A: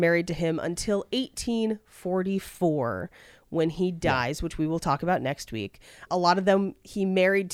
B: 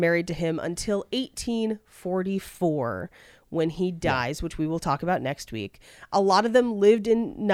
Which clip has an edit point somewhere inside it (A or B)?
A